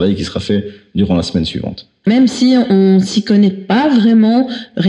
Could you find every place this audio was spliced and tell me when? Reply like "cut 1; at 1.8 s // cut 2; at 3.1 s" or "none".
cut 1; at 2.0 s